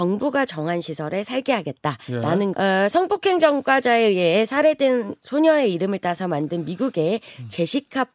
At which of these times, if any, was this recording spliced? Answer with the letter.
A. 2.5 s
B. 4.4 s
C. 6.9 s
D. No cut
A